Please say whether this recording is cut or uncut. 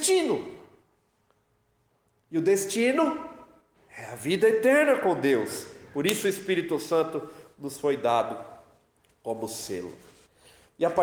uncut